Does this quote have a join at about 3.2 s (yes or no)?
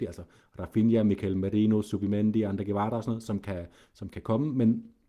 no